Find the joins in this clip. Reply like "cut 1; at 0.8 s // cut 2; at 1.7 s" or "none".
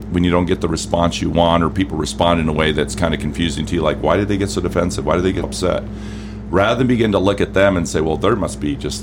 cut 1; at 5.4 s